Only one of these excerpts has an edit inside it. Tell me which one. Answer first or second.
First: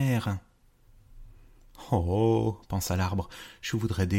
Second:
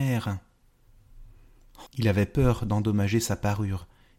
second